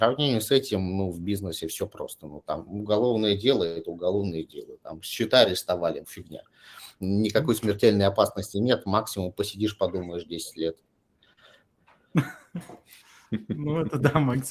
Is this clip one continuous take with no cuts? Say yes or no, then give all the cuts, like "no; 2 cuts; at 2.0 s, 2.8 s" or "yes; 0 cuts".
no; 1 cut; at 6.0 s